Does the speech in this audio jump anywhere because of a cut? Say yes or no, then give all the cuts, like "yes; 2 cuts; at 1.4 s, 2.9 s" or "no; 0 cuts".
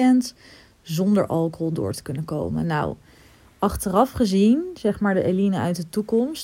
no; 0 cuts